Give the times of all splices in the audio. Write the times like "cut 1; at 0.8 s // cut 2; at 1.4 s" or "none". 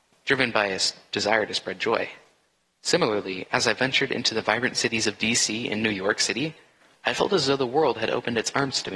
none